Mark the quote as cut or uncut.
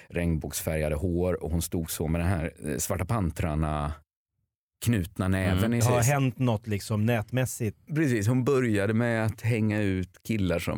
cut